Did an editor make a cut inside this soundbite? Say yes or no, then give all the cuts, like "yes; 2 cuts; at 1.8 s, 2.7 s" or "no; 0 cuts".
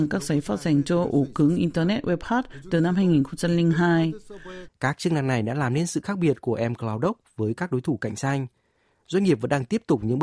yes; 1 cut; at 4.7 s